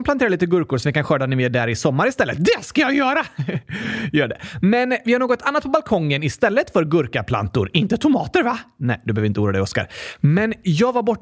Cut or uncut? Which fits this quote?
uncut